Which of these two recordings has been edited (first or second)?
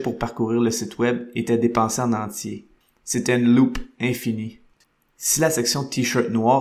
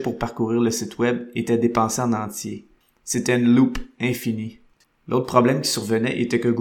second